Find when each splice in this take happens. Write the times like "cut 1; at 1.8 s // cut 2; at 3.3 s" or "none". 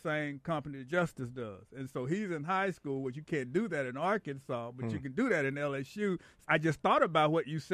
cut 1; at 6.4 s